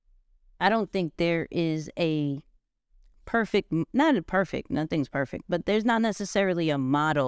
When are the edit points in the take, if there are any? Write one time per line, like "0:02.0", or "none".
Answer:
none